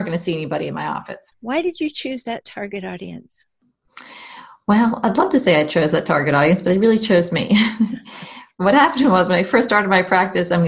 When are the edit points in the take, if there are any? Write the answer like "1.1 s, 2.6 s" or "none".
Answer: 1.3 s